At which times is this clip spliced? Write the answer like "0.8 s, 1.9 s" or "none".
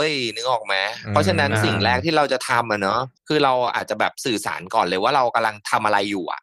3.2 s